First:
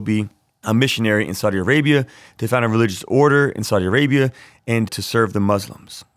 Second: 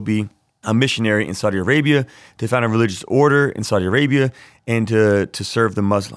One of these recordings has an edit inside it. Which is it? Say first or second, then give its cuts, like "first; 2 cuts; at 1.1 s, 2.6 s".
first; 1 cut; at 4.9 s